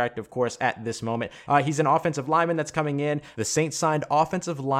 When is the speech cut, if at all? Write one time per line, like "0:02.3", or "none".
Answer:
0:01.5
0:03.3